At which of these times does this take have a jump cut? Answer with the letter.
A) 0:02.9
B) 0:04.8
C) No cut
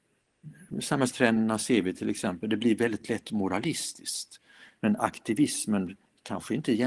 B